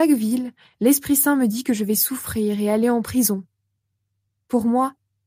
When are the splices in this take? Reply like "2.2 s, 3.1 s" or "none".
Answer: none

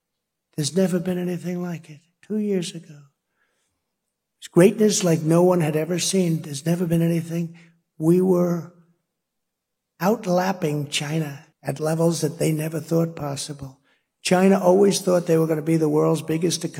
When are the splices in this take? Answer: 11.5 s

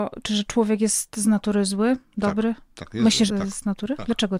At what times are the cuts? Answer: 3.3 s

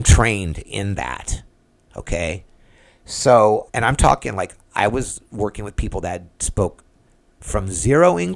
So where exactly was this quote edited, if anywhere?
3.7 s

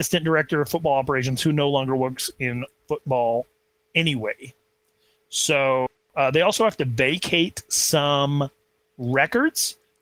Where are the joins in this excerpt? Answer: none

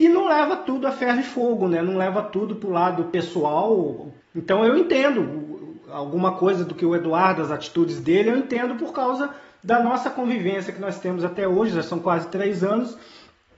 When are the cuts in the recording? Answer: 4.2 s

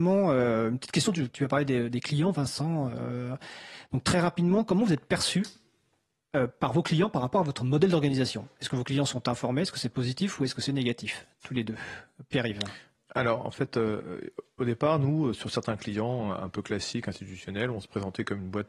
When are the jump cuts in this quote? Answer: none

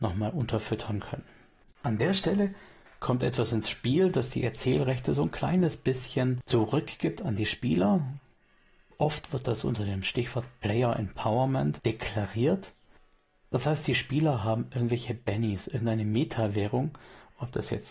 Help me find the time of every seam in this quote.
1.6 s

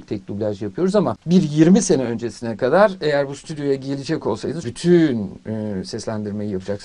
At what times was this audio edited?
4.6 s

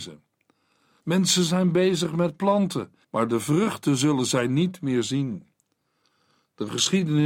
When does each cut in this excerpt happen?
1.0 s, 3.0 s

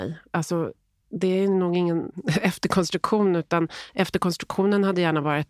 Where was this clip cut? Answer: none

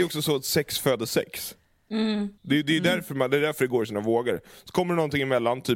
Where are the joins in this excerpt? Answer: 2.4 s

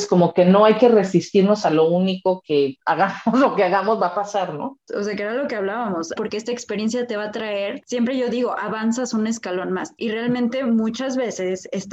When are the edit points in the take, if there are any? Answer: 4.9 s, 6.2 s, 10.0 s

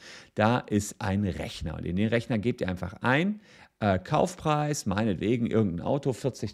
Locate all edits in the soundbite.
none

